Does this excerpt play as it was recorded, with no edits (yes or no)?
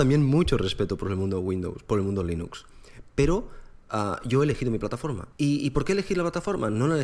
no